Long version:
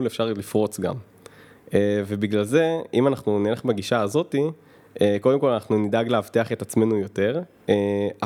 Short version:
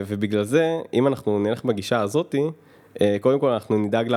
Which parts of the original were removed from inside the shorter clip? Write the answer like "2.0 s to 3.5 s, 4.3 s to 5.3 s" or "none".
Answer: none